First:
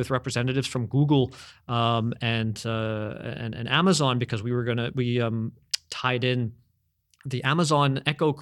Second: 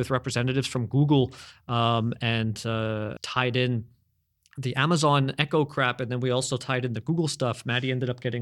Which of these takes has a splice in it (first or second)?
second